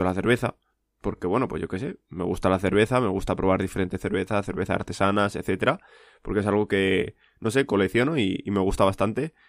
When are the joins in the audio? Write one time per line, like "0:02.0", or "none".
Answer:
none